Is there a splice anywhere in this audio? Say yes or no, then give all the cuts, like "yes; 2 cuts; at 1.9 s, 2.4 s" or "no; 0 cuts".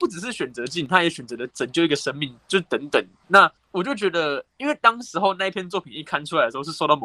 no; 0 cuts